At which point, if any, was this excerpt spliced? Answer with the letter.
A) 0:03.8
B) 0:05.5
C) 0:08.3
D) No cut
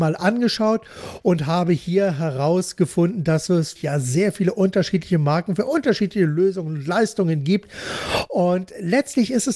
A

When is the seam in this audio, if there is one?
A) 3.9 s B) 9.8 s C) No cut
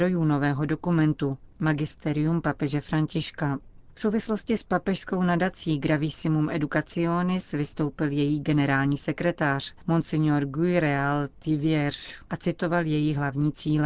C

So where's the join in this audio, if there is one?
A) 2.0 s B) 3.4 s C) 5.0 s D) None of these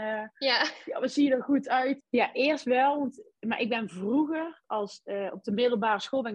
A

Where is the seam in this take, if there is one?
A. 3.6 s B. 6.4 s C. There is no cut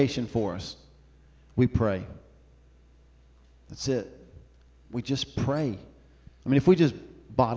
B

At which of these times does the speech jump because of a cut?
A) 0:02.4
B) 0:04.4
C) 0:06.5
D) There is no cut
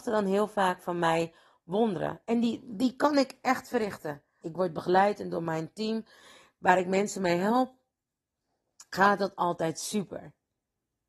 B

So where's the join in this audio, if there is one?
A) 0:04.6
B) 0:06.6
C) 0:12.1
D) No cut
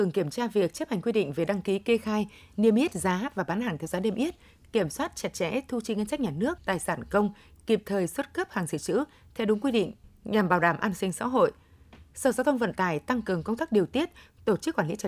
B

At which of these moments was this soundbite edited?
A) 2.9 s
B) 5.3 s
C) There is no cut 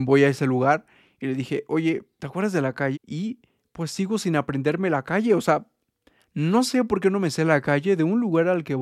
A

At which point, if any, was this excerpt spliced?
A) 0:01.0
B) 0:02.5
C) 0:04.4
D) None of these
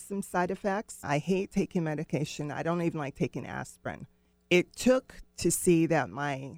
A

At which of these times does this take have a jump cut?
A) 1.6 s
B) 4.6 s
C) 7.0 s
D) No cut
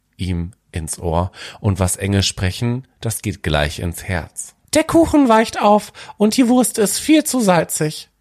B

